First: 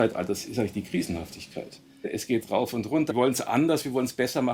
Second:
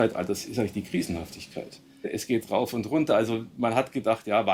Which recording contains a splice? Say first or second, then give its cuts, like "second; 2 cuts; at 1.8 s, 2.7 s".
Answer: first; 1 cut; at 3.1 s